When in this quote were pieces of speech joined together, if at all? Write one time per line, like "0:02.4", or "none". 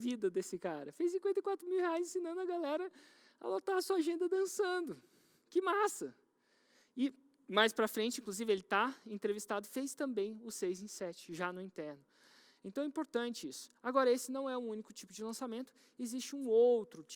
none